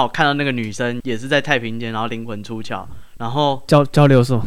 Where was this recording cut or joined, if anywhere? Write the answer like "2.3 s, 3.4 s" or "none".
1.0 s, 3.2 s